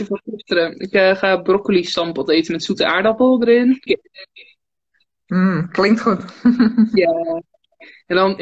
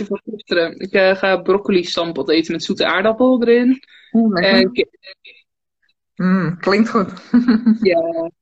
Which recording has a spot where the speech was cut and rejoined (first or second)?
first